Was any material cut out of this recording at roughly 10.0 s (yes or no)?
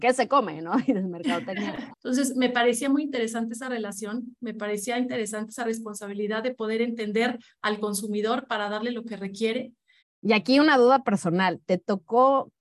yes